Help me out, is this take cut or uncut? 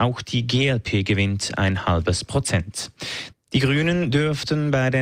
cut